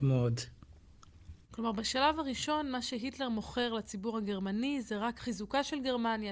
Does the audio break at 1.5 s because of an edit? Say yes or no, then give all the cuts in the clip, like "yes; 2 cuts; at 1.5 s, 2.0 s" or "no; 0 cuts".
no; 0 cuts